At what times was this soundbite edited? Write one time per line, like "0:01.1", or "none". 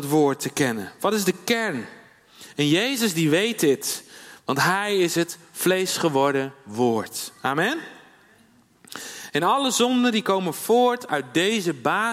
none